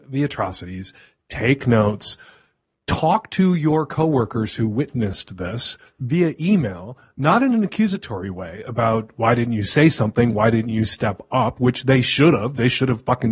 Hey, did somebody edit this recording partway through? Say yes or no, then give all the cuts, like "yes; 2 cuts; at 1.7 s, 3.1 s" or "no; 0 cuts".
no; 0 cuts